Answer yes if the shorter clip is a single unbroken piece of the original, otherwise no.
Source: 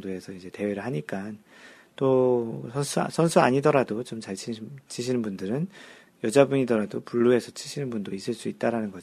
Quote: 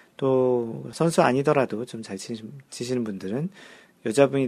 no